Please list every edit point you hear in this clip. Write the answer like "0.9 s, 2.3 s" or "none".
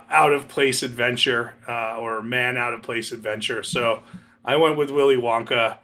none